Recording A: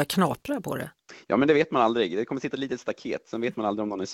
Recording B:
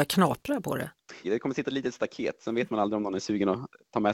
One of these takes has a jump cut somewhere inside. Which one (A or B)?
B